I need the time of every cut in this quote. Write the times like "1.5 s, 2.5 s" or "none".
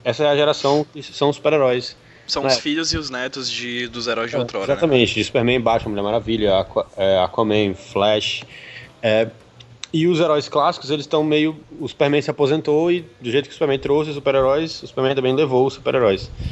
none